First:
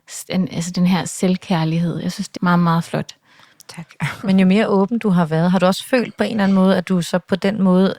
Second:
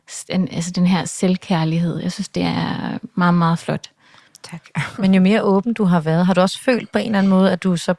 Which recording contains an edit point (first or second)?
first